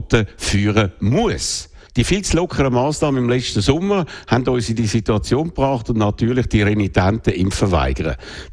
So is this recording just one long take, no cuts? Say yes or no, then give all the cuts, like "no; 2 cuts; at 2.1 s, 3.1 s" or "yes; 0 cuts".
no; 1 cut; at 1.9 s